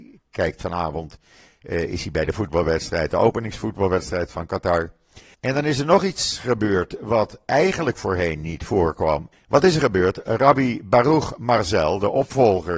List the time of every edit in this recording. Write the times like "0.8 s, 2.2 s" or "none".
5.3 s, 9.3 s

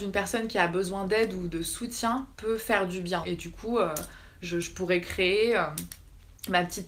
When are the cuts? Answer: 3.2 s

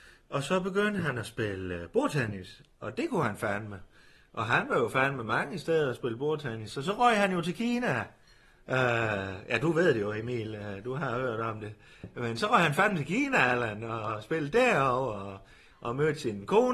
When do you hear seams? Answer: none

